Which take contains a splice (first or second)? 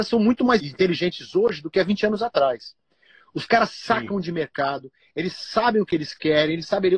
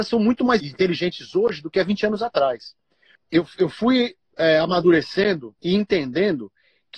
second